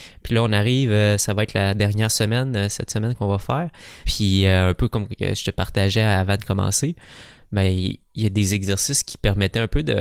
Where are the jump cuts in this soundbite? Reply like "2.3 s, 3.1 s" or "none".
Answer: 4.0 s